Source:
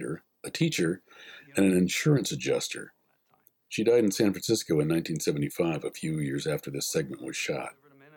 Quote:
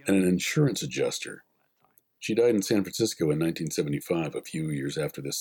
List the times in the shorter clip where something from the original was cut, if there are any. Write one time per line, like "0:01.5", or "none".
none